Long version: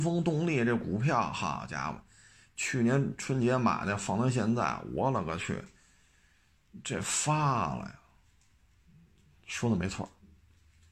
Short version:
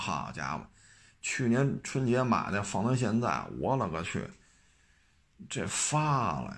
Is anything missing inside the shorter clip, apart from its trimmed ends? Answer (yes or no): no